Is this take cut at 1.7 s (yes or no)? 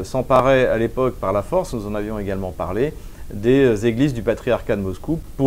no